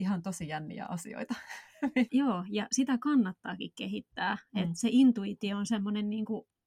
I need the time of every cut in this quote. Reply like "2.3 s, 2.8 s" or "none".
2.1 s